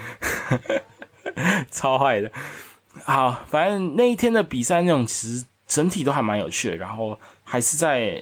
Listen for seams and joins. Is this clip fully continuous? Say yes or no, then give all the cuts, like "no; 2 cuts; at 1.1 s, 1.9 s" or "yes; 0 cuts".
yes; 0 cuts